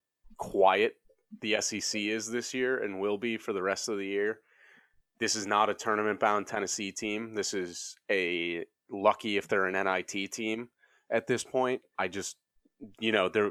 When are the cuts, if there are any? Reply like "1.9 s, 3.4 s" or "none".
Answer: 11.9 s